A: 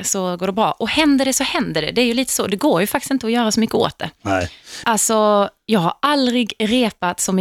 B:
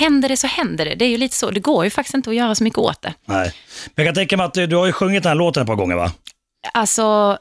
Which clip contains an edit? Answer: A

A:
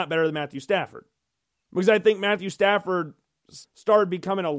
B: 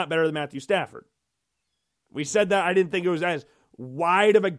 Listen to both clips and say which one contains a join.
A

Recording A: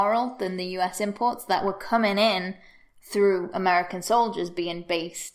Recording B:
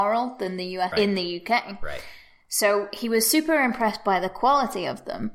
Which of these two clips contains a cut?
B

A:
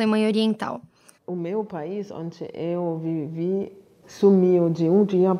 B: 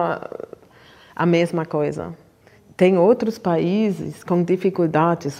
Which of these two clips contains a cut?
A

